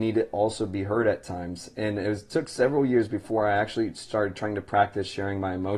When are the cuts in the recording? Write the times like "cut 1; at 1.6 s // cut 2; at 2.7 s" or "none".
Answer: none